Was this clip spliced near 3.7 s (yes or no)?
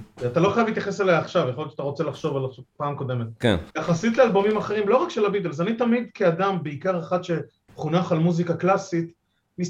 yes